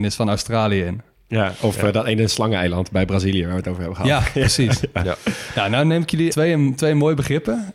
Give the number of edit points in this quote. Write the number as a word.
one